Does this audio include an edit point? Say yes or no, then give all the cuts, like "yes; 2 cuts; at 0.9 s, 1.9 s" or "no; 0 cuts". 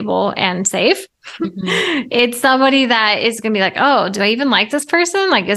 no; 0 cuts